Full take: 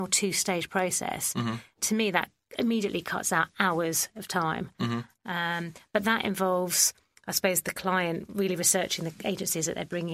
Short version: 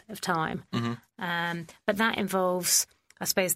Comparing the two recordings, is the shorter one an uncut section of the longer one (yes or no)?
yes